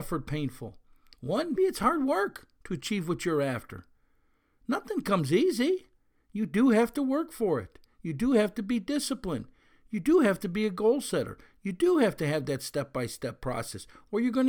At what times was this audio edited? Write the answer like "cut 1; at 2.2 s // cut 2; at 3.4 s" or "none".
cut 1; at 1.6 s